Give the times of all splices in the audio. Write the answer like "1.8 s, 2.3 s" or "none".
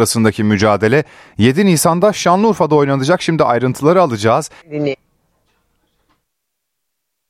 4.6 s